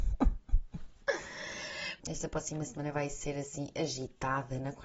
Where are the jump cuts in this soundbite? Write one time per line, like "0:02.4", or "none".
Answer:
0:02.0